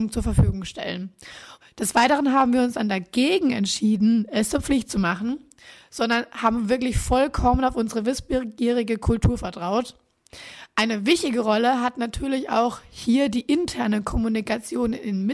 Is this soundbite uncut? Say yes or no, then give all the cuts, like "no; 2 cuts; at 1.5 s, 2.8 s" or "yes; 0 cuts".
no; 1 cut; at 1.6 s